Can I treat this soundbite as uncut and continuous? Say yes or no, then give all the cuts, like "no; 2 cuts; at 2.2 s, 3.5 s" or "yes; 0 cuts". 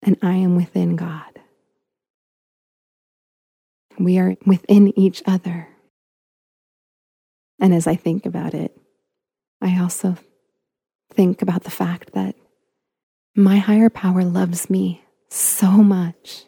yes; 0 cuts